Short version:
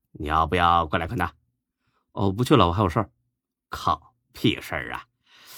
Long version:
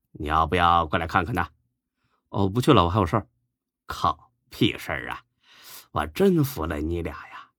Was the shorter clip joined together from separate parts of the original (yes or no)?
yes